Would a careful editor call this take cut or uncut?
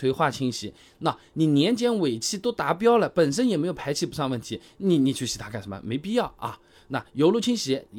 uncut